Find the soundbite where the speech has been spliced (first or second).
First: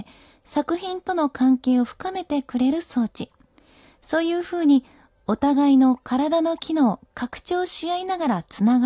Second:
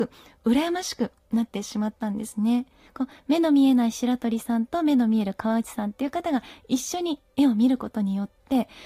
second